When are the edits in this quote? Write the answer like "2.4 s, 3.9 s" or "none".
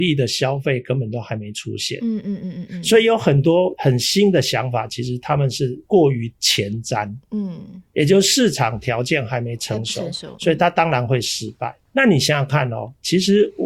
none